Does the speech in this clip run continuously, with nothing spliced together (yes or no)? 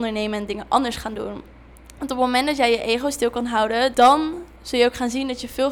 no